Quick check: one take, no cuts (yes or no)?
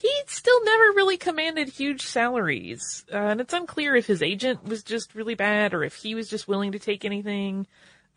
yes